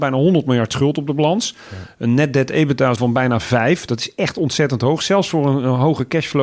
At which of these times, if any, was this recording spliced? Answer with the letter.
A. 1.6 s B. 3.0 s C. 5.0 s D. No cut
B